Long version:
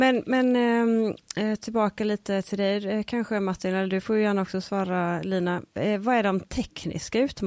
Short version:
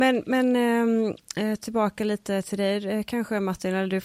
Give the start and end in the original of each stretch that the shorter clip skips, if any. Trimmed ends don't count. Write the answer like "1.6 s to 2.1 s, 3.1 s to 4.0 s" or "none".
none